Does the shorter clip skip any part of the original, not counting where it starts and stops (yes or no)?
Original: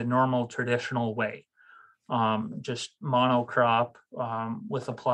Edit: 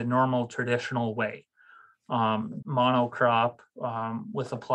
yes